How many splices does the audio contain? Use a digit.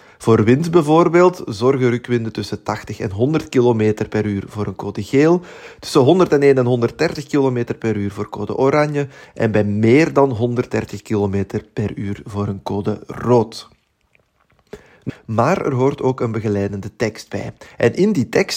1